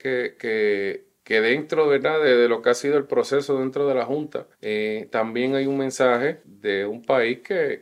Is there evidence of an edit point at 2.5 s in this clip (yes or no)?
no